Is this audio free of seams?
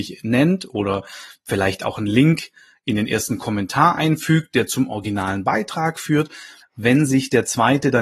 no; 1 cut; at 6.6 s

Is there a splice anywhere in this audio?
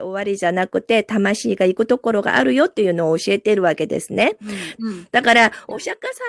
yes; 1 cut; at 4.8 s

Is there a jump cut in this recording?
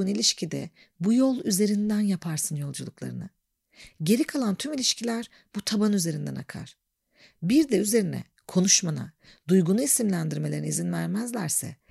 no; 0 cuts

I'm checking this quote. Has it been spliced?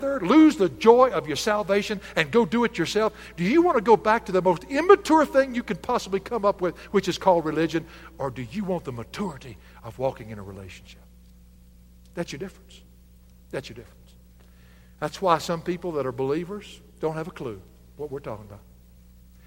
no; 0 cuts

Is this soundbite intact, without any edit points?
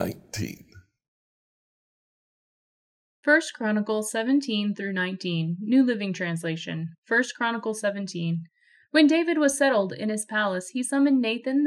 yes; 0 cuts

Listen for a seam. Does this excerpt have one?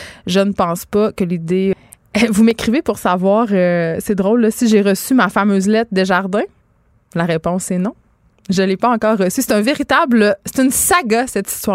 yes; 1 cut; at 1.7 s

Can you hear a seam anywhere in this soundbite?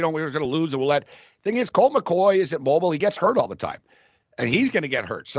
no; 0 cuts

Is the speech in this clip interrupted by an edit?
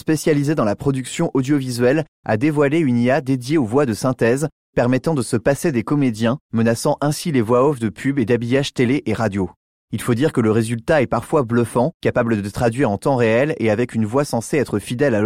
no; 0 cuts

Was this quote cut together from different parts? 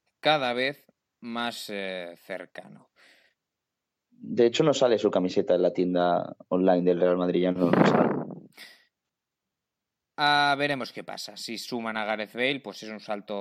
no; 0 cuts

